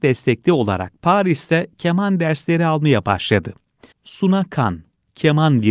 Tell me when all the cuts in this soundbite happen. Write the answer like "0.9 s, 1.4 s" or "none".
3.9 s